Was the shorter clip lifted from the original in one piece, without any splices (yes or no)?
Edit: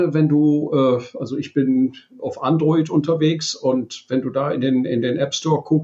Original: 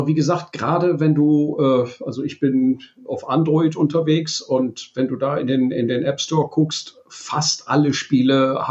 yes